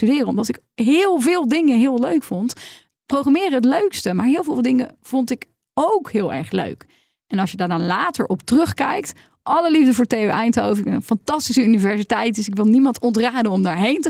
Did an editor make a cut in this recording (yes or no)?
no